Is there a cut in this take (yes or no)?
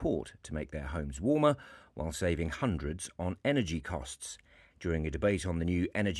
yes